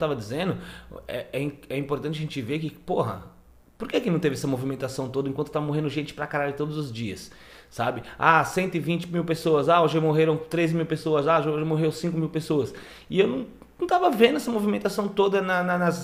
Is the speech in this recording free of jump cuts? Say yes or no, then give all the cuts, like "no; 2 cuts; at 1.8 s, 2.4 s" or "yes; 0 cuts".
yes; 0 cuts